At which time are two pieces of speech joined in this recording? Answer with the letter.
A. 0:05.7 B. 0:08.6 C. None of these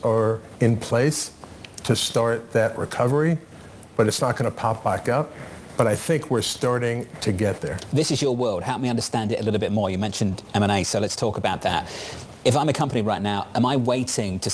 A